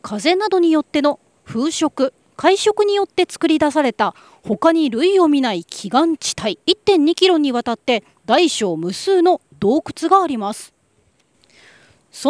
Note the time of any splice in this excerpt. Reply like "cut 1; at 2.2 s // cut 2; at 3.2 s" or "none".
cut 1; at 6.6 s